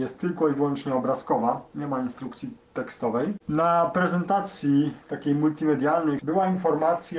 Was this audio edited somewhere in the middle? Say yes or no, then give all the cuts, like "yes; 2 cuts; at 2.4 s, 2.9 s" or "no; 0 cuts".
yes; 2 cuts; at 3.4 s, 6.2 s